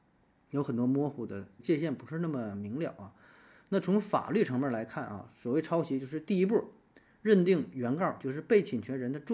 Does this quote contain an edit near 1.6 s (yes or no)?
yes